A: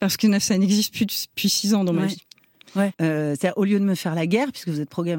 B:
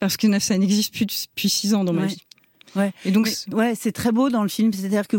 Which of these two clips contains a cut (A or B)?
A